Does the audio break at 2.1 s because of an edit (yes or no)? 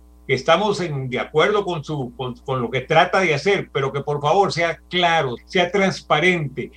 yes